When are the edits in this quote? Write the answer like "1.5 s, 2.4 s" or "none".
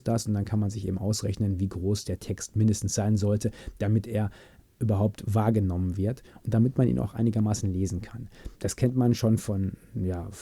8.5 s